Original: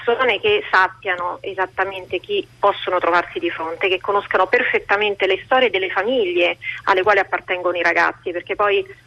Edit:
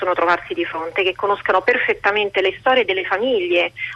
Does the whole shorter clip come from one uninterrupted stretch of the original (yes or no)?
yes